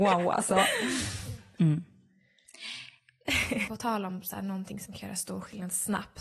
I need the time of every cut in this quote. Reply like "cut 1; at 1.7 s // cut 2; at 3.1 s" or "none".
cut 1; at 1.6 s // cut 2; at 3.7 s